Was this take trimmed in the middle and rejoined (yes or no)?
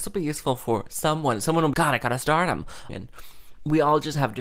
yes